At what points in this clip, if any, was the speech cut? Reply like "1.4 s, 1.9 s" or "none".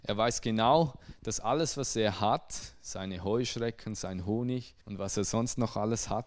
4.8 s